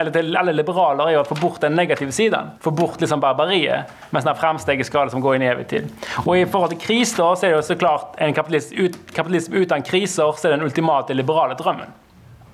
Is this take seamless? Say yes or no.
no